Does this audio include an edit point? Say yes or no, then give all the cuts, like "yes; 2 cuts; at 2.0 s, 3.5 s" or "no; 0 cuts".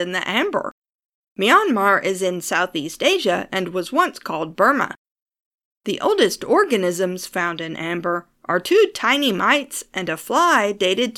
no; 0 cuts